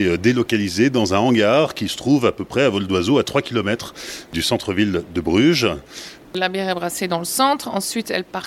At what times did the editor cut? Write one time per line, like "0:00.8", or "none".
0:06.2